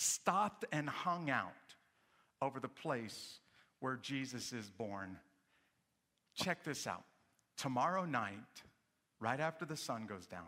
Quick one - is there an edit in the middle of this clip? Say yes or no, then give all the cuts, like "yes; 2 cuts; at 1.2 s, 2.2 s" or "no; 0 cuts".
no; 0 cuts